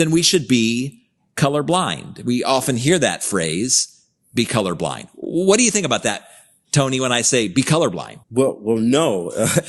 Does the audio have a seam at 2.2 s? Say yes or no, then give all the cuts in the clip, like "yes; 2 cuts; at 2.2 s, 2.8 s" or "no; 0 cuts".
no; 1 cut; at 8.2 s